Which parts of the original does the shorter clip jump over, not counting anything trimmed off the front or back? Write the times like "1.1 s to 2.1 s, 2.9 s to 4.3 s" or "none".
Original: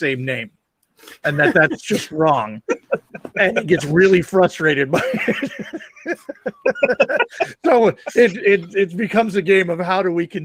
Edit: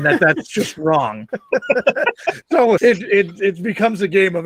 2.6 s to 6.4 s, 7.9 s to 8.1 s

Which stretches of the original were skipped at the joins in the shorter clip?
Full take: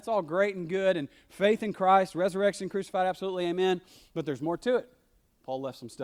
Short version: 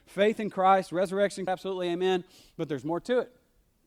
2.7 s to 3.0 s

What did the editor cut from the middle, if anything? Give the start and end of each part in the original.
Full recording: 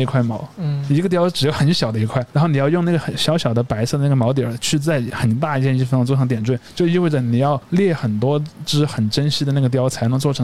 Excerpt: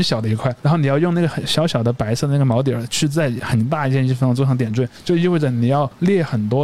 none

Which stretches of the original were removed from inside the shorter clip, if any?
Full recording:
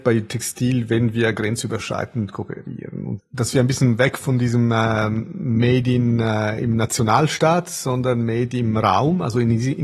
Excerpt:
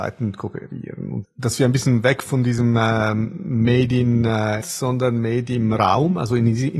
6.6 s to 7.6 s

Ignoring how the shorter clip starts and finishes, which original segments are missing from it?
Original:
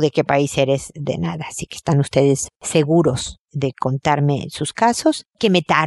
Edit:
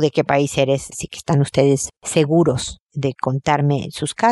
0.9 s to 1.5 s

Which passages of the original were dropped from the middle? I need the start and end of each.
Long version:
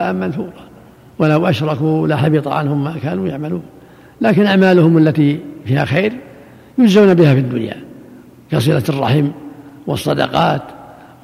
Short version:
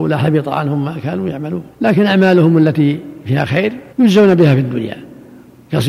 3.7 s to 4.1 s, 6.3 s to 6.7 s

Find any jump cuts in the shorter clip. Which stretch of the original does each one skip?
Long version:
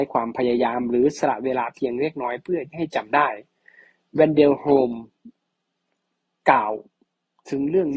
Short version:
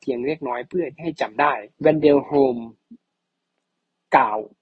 3.5 s to 4.1 s

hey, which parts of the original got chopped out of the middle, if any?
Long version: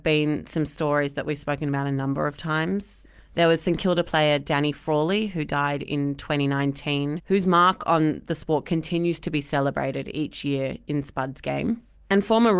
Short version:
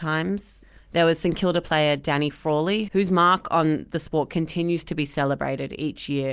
5.3 s to 7.2 s

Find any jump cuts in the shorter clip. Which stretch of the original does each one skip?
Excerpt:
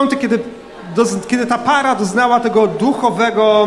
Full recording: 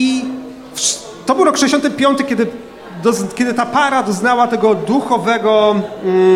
none

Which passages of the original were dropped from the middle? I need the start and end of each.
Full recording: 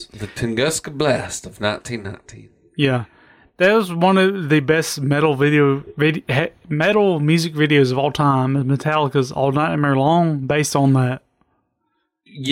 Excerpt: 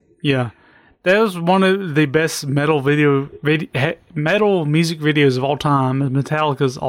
none

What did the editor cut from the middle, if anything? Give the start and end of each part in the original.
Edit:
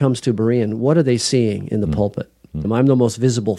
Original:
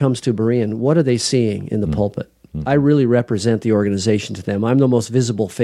2.6 s to 4.6 s

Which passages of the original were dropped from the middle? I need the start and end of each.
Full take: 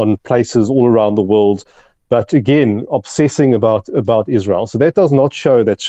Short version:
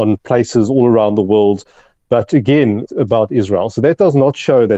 2.9 s to 3.8 s

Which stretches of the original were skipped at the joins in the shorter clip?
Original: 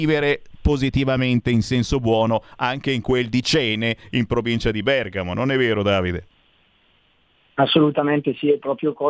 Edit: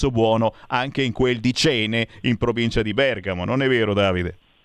none

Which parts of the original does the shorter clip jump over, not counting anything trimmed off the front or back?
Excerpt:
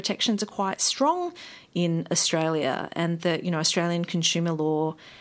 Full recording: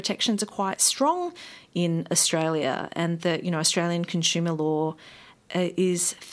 none

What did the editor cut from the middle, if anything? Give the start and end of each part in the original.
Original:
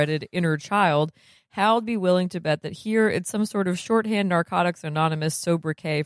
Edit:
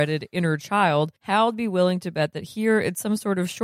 1.2 s to 1.5 s

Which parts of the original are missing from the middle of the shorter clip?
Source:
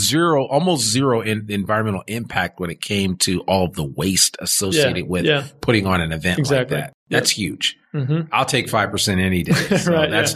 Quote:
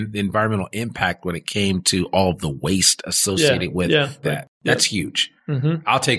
5.6 s to 6.7 s

